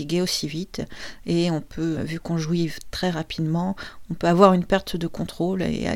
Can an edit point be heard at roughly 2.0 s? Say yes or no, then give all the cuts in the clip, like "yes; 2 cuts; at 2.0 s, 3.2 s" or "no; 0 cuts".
yes; 1 cut; at 2.0 s